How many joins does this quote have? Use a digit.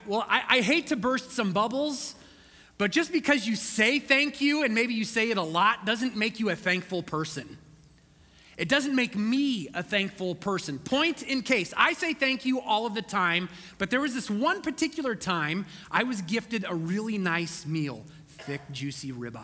0